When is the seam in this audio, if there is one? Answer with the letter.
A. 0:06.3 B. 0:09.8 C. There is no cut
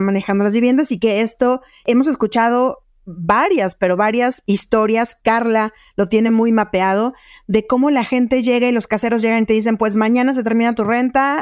C